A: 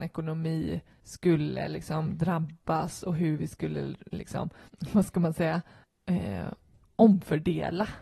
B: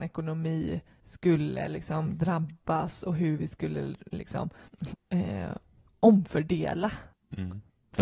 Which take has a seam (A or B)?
B